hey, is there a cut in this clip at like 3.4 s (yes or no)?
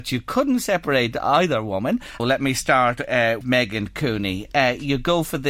yes